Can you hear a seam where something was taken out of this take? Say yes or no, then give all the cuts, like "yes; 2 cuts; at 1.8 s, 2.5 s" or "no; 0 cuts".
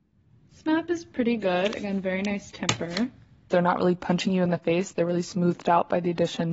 yes; 1 cut; at 3.5 s